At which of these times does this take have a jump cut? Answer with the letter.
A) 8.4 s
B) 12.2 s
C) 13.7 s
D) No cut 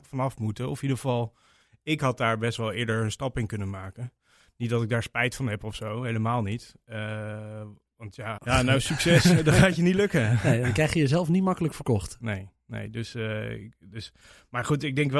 A